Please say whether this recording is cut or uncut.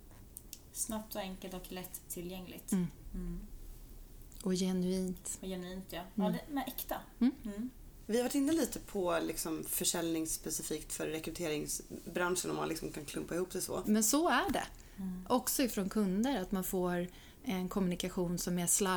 cut